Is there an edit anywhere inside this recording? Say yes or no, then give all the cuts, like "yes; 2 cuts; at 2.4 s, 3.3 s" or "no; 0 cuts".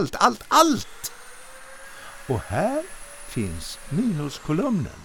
no; 0 cuts